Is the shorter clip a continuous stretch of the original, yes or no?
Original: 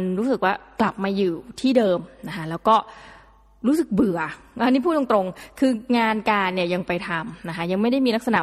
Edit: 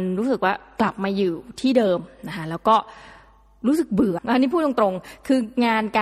no